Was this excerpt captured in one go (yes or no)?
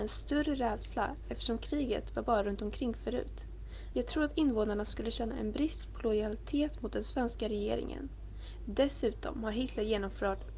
no